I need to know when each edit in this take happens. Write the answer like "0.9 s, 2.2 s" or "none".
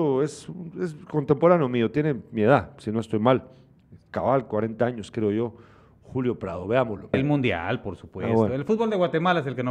7.1 s